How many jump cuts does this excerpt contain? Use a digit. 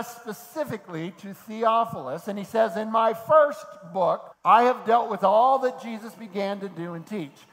1